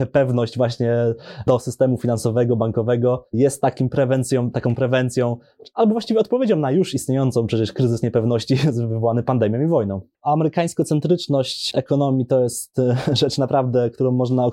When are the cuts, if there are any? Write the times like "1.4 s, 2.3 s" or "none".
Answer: 10.1 s